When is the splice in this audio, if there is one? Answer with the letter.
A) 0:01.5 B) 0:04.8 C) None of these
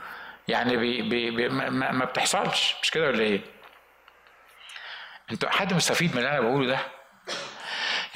A